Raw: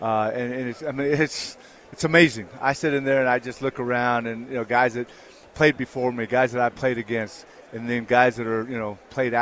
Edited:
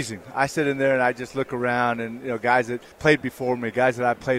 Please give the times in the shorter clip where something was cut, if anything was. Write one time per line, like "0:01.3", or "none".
0:02.9